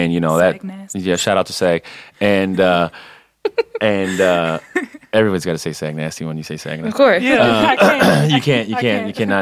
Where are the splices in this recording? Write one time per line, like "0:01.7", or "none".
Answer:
none